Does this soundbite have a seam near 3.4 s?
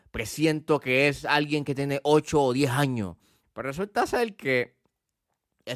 yes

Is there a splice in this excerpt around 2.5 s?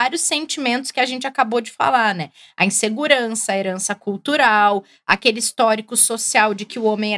no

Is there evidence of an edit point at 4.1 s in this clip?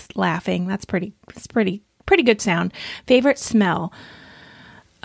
no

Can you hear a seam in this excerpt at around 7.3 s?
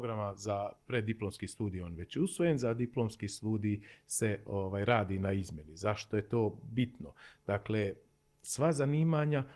no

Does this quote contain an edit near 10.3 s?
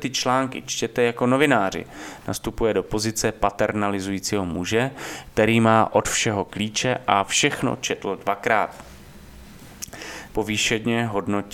yes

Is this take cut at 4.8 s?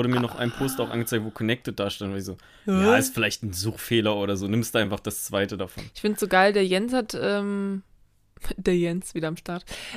no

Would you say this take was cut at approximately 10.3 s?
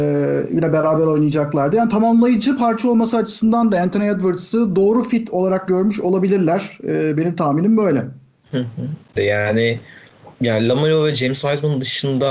yes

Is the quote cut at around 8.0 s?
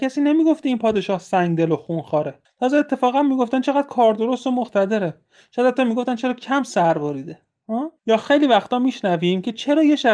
yes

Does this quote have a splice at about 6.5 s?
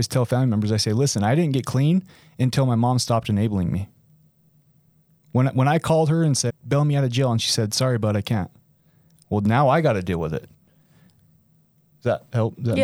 yes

